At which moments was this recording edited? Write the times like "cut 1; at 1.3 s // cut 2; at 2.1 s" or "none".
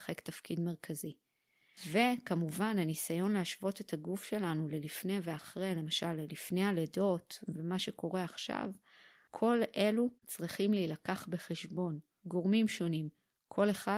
cut 1; at 10.2 s // cut 2; at 12.2 s